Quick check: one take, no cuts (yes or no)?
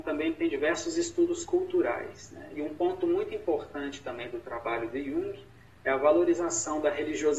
yes